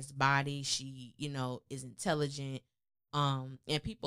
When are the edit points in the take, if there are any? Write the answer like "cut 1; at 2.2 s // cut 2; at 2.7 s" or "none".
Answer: none